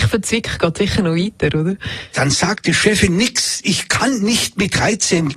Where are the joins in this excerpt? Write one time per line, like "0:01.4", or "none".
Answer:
0:02.1